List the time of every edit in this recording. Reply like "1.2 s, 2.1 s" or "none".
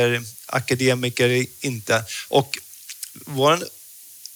2.3 s